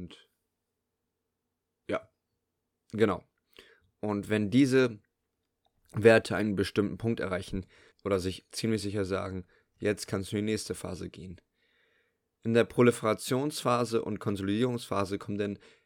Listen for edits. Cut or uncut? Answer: cut